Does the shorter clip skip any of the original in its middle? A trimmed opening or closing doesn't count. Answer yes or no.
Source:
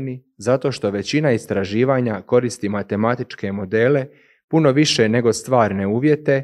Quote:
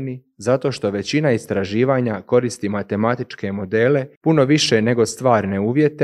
yes